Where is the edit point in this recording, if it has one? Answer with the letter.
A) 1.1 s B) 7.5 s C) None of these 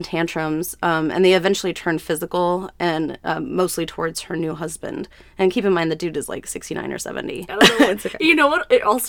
B